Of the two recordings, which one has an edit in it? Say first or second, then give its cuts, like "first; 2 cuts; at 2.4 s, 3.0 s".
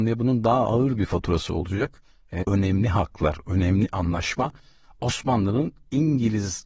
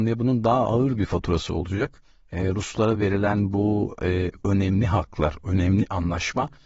first; 1 cut; at 2.4 s